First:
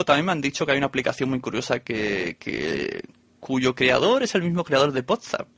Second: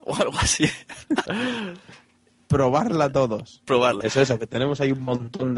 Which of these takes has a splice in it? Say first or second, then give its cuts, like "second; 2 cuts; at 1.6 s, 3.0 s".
second; 2 cuts; at 1.3 s, 4.0 s